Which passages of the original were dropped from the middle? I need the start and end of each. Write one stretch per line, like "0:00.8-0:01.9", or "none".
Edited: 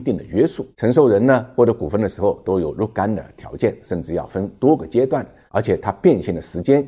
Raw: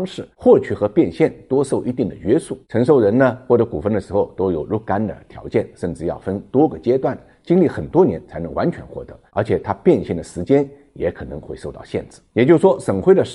0:07.3-0:09.2